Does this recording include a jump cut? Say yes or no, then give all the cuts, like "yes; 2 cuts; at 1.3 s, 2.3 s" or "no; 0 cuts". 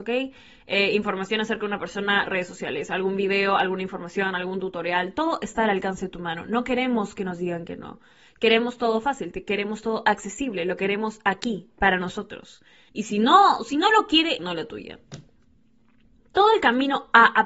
yes; 2 cuts; at 12.9 s, 14.4 s